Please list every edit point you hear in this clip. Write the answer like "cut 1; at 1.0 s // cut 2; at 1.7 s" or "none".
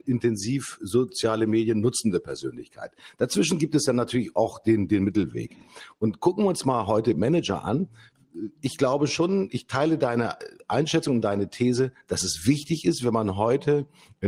none

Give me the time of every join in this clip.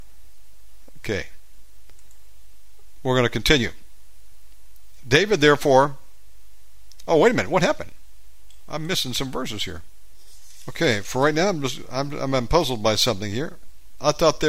none

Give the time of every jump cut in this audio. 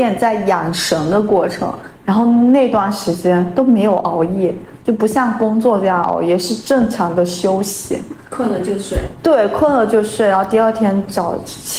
none

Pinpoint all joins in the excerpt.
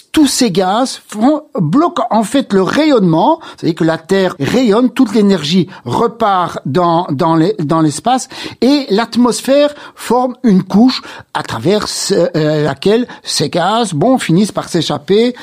cut 1; at 4.4 s

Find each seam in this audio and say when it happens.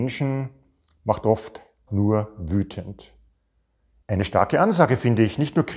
cut 1; at 1.9 s // cut 2; at 4.0 s

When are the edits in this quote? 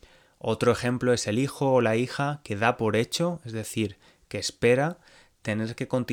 none

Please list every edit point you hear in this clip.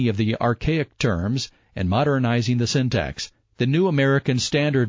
cut 1; at 3.4 s

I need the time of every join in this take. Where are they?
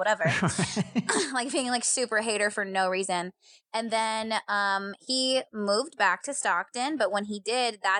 none

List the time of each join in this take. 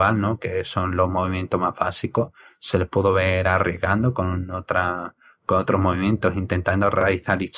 none

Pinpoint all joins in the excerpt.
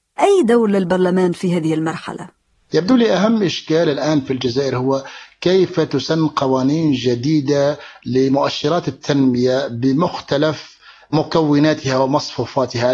none

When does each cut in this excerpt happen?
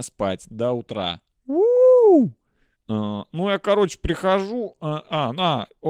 cut 1; at 2.7 s

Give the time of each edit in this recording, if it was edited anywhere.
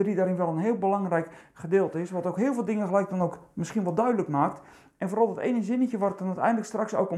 none

